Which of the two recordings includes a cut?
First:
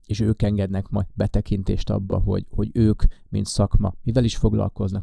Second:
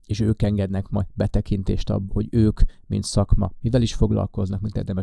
second; 1 cut; at 2.1 s

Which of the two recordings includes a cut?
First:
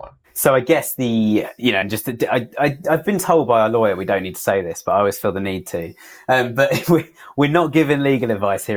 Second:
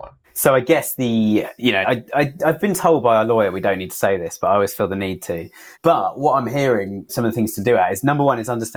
second; 3 cuts; at 1.8 s, 5.7 s, 7.1 s

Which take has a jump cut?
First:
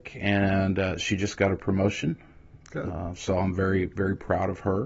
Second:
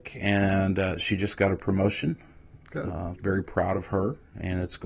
second; 1 cut; at 3.2 s

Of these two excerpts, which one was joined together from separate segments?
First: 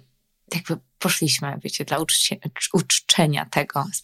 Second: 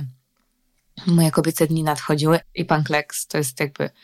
second; 1 cut; at 2.4 s

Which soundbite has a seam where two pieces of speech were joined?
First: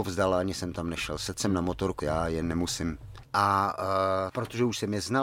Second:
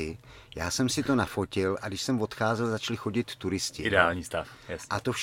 first; 3 cuts; at 2.0 s, 3.2 s, 4.3 s

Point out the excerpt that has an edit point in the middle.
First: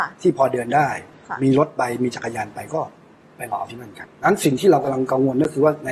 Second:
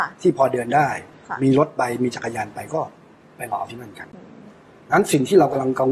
first; 1 cut; at 4.1 s

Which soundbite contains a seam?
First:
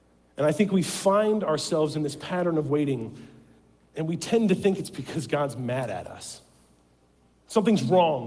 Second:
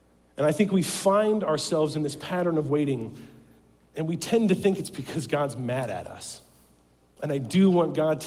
second; 1 cut; at 7.2 s

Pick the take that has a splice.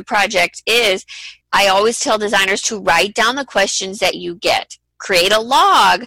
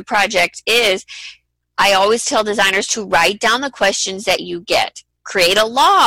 first; 1 cut; at 1.4 s

